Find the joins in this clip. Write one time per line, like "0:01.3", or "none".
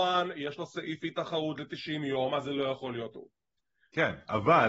none